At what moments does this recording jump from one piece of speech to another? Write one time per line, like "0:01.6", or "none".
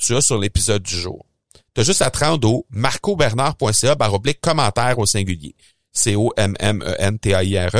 0:01.6